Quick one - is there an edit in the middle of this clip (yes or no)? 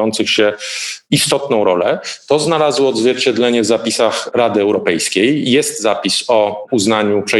no